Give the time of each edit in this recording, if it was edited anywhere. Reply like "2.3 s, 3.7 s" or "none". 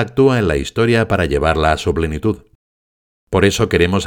none